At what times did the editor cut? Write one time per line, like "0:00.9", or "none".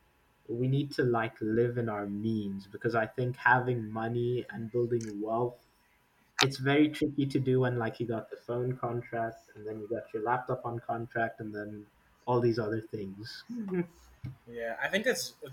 none